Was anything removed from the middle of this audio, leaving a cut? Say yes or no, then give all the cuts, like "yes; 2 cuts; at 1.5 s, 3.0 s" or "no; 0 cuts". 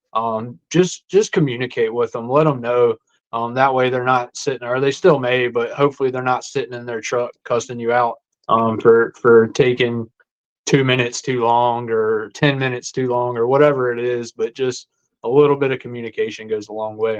no; 0 cuts